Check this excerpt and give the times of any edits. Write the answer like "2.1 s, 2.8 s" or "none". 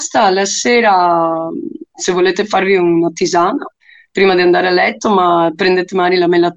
1.9 s